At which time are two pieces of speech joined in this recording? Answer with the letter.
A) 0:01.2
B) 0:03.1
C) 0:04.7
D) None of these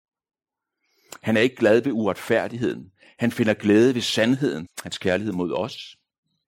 C